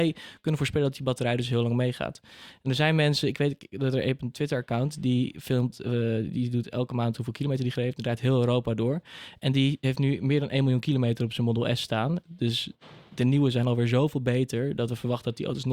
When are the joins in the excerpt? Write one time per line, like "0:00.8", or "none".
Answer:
0:12.2